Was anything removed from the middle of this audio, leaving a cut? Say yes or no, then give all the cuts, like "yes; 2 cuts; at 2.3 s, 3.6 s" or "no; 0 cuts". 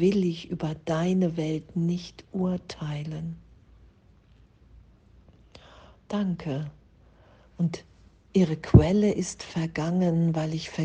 no; 0 cuts